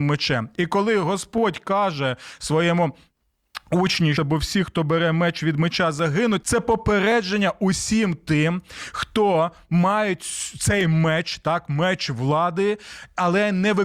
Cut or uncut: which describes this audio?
cut